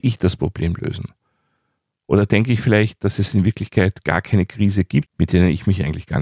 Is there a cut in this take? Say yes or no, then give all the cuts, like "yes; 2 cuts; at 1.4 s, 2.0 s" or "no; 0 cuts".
yes; 1 cut; at 5.1 s